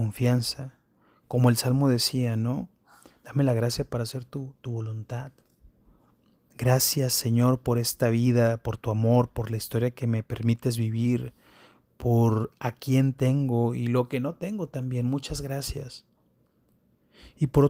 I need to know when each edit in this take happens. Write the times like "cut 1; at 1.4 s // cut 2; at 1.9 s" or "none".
cut 1; at 6.4 s